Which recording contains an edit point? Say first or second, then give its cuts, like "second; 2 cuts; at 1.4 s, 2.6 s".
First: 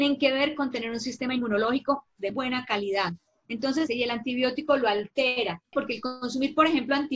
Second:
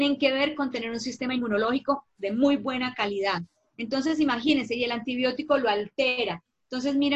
first; 3 cuts; at 2.3 s, 3.9 s, 5.7 s